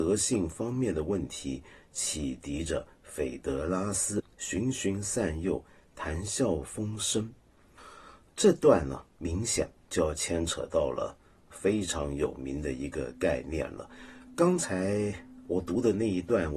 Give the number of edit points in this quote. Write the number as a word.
one